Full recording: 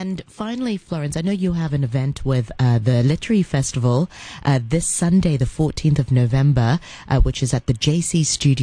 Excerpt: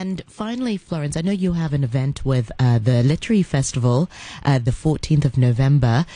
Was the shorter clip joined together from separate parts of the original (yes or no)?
yes